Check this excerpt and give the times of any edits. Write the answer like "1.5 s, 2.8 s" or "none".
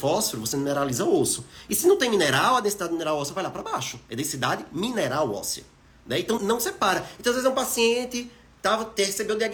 6.4 s